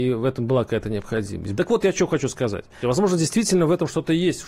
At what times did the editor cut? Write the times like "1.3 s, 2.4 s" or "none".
1.6 s, 2.8 s